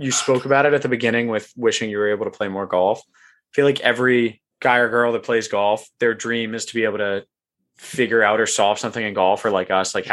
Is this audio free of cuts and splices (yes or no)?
no